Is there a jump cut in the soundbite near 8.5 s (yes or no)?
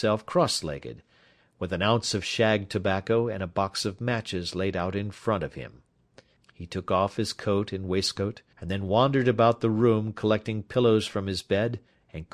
yes